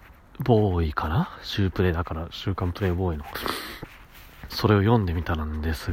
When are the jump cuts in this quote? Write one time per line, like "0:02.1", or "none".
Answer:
0:04.5